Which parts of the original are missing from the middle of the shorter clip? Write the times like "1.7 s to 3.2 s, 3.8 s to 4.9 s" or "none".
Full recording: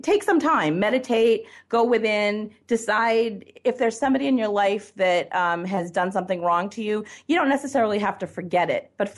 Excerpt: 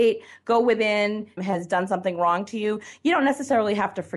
2.6 s to 5.6 s